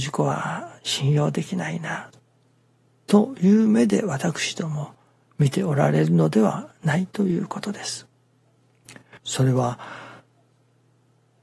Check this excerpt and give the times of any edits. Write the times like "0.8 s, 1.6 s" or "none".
2.9 s, 9.2 s